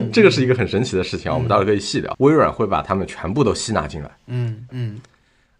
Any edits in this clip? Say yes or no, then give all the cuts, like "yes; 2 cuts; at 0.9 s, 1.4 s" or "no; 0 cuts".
yes; 2 cuts; at 2.1 s, 4.7 s